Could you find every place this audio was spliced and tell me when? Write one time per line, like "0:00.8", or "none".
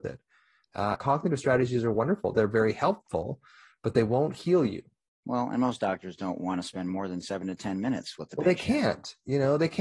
0:00.9
0:05.1